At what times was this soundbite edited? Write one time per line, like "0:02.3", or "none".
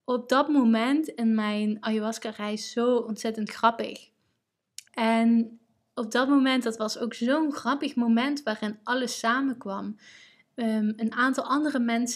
0:04.9